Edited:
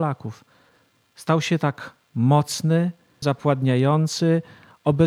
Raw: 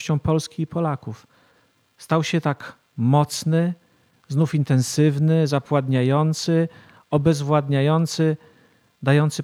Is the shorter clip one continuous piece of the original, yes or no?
no